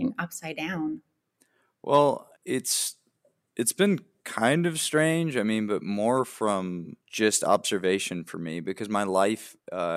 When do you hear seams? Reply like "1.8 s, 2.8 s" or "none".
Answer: 2.3 s, 7.0 s